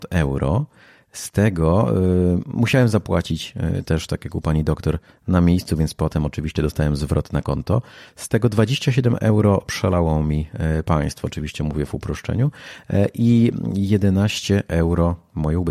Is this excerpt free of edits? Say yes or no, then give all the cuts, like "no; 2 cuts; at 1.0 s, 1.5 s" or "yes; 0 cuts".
yes; 0 cuts